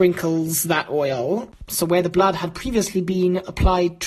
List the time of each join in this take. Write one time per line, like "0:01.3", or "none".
0:01.7